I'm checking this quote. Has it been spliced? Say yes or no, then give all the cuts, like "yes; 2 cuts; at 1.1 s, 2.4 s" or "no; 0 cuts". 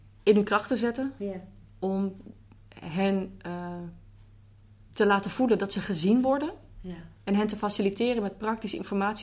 no; 0 cuts